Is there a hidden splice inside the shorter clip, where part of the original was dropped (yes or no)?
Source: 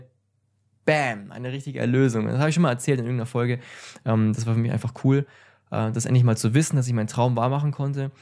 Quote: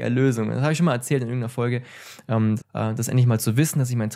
yes